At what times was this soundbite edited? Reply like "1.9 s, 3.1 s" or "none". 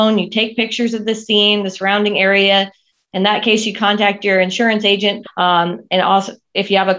5.2 s